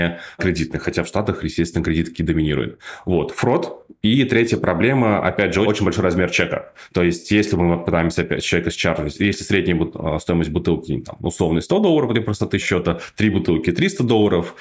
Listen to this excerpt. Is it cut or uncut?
uncut